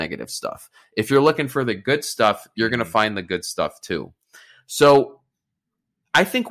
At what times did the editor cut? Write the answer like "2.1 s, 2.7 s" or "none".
none